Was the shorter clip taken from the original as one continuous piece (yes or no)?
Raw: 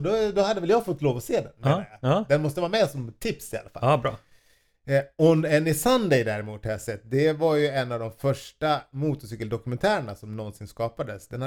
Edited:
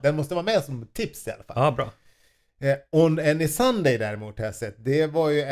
yes